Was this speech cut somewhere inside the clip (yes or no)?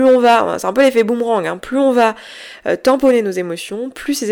no